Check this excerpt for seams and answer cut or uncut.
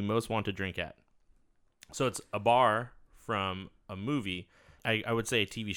cut